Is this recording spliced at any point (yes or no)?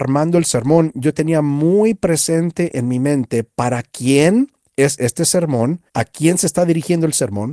yes